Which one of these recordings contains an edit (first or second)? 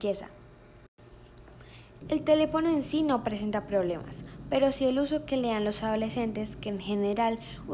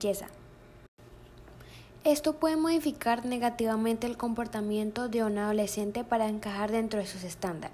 first